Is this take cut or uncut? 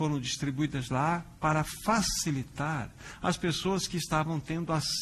uncut